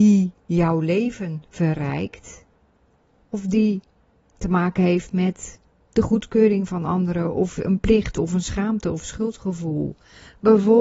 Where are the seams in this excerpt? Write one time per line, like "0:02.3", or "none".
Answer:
0:03.2